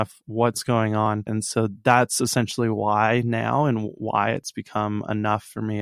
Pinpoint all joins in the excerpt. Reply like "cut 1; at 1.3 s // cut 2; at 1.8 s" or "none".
cut 1; at 1.3 s